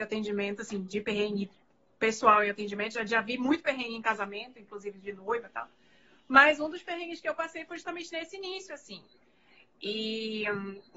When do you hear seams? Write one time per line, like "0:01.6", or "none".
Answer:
none